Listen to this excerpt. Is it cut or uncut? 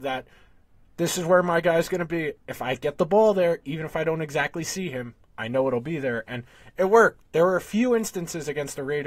uncut